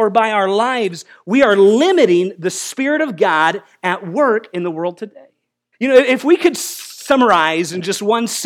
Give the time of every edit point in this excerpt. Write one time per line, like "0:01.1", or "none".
0:05.7